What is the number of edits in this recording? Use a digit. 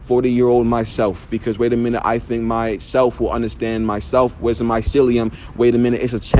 0